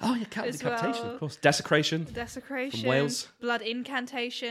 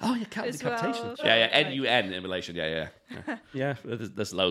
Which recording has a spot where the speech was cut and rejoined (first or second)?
second